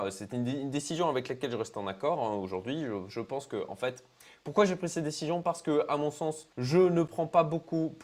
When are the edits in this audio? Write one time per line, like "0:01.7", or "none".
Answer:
0:06.5